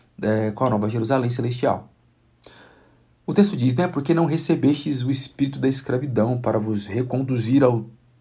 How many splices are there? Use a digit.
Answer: 0